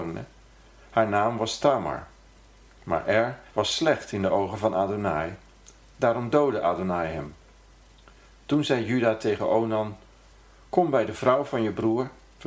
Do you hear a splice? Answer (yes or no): yes